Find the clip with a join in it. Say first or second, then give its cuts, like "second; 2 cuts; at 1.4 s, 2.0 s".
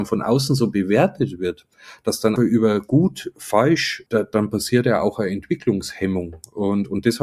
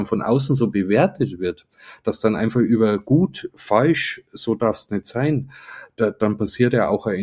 first; 2 cuts; at 2.4 s, 4.1 s